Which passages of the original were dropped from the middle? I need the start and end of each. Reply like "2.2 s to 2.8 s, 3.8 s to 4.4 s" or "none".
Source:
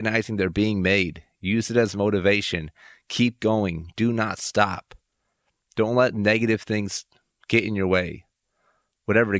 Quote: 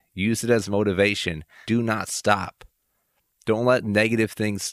2.9 s to 3.9 s